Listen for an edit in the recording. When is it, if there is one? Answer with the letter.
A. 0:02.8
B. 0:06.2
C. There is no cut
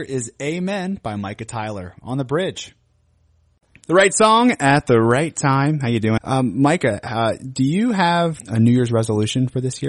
B